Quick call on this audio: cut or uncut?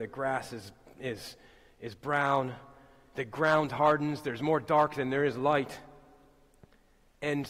uncut